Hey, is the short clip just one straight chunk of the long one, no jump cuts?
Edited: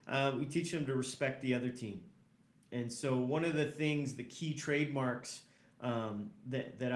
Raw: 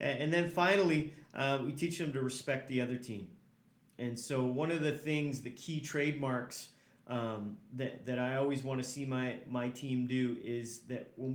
yes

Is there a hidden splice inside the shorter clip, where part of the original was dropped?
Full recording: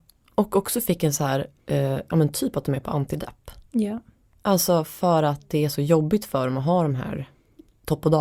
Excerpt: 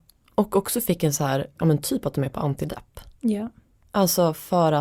yes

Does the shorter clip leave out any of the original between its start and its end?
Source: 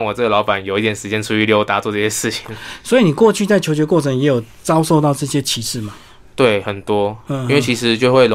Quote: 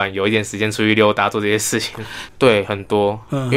yes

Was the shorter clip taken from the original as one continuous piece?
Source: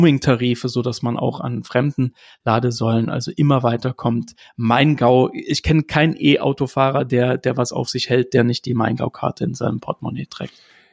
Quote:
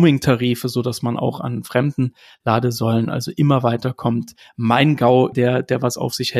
no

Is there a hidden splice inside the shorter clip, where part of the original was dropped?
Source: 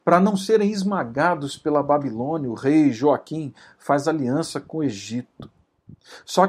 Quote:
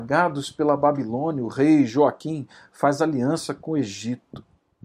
no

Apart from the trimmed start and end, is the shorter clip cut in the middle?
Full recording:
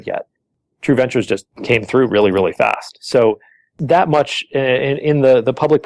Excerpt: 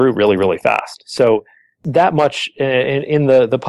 no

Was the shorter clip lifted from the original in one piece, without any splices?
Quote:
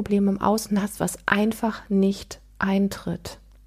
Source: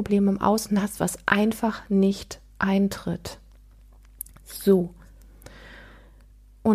yes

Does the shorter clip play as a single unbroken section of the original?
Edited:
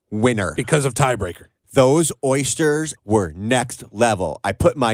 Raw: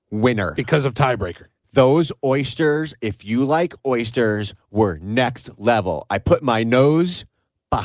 no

